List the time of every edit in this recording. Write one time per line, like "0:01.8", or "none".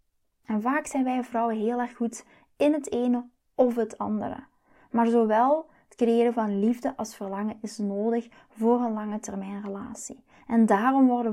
none